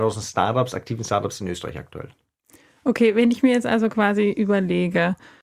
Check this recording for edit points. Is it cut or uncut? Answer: uncut